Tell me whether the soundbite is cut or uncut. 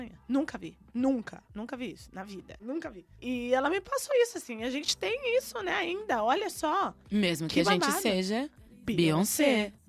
cut